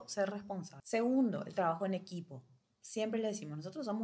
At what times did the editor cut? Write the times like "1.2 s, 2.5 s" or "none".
none